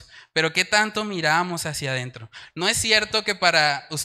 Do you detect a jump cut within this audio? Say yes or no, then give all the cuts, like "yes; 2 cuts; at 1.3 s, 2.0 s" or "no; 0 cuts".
yes; 1 cut; at 2.5 s